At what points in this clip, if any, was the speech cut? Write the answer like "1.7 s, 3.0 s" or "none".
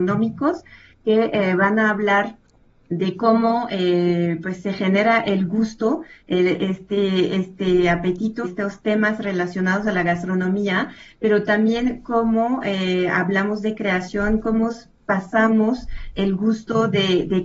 8.4 s